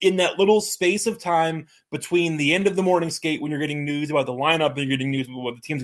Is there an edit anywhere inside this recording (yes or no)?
no